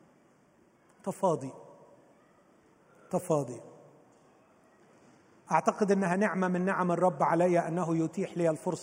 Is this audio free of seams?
yes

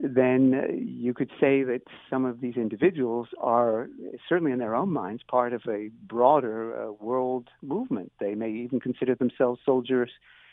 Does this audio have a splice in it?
no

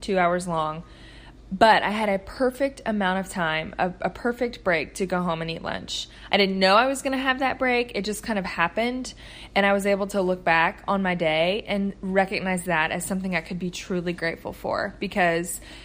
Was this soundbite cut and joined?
no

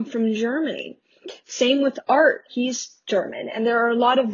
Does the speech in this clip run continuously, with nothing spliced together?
no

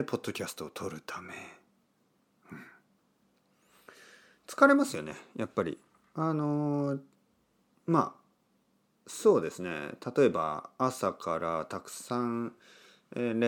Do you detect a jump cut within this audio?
no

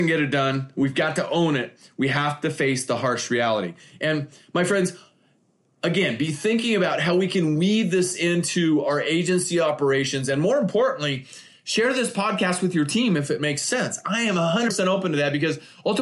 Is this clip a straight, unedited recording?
yes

